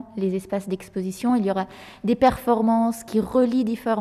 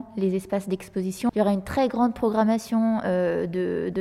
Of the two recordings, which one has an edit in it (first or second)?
second